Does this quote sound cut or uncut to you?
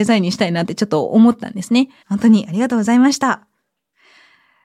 cut